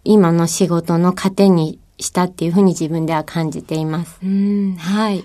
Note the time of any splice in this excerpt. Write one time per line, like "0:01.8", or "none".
0:04.2